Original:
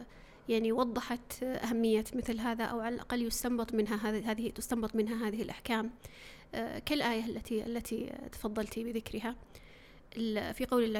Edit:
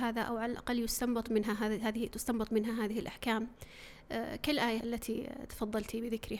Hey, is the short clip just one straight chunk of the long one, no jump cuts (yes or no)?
no